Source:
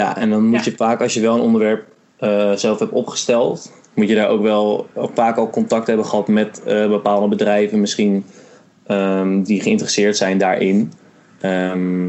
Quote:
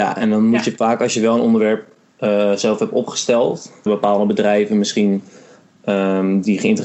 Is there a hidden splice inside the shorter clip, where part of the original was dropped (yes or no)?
yes